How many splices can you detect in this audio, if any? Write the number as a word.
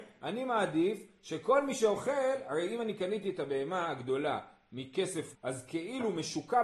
one